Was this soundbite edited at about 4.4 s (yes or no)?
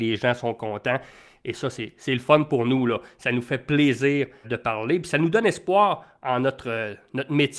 yes